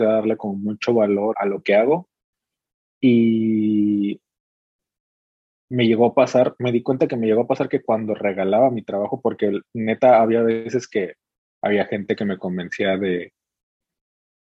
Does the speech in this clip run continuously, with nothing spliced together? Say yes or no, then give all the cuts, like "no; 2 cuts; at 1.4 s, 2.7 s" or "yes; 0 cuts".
no; 1 cut; at 1.3 s